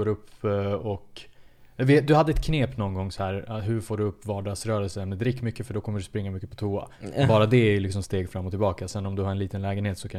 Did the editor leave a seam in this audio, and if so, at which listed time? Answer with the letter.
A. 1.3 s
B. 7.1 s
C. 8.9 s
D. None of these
D